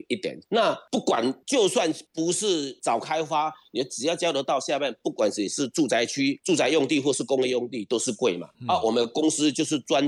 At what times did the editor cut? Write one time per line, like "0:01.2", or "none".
none